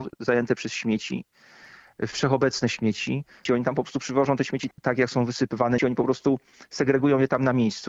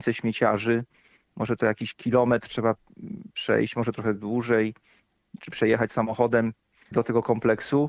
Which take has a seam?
first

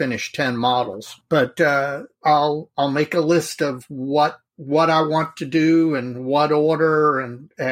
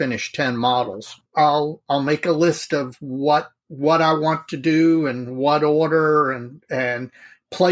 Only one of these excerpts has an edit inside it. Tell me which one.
second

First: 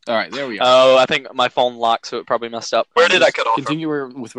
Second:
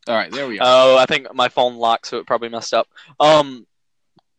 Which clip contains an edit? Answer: first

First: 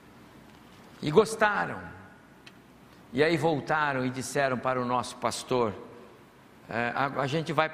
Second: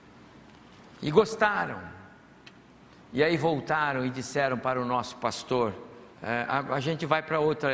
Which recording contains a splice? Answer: second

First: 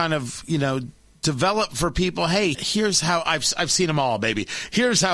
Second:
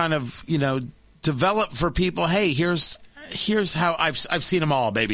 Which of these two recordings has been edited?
first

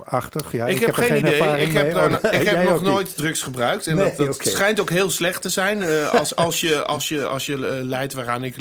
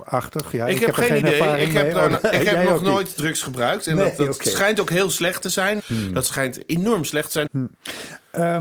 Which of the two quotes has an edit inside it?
second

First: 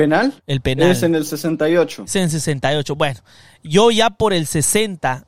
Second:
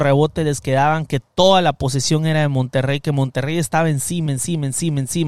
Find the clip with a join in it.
second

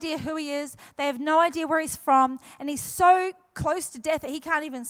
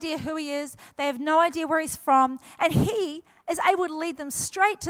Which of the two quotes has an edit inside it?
second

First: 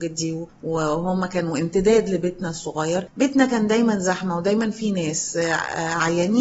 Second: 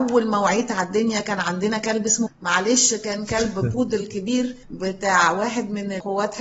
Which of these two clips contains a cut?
second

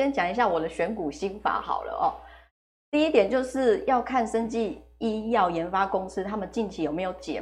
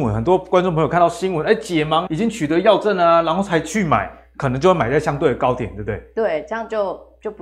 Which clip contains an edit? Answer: second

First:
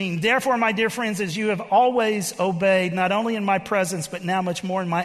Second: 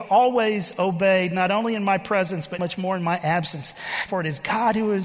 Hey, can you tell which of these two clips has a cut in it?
second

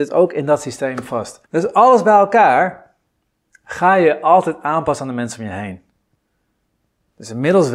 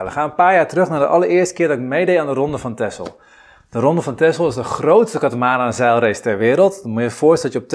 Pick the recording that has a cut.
first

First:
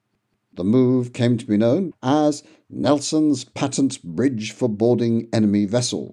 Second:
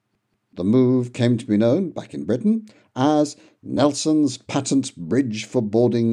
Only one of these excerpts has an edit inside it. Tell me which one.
first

